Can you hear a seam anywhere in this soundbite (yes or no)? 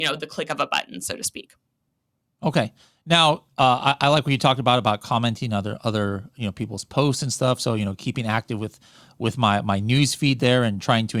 no